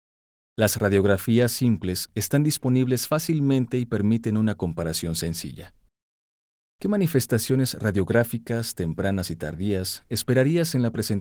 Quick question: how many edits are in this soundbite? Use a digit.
0